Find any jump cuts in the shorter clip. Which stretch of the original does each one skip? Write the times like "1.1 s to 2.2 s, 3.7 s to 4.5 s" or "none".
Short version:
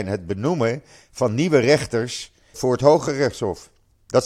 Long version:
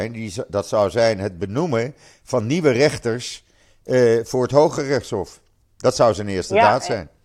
3.7 s to 4.2 s